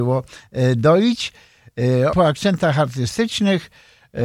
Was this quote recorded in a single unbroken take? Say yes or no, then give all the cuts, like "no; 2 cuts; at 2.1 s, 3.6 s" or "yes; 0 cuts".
no; 1 cut; at 2.1 s